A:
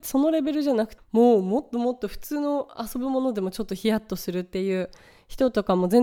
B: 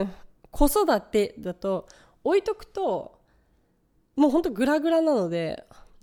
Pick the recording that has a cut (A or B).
A